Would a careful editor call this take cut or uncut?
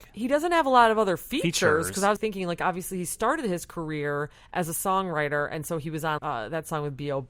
cut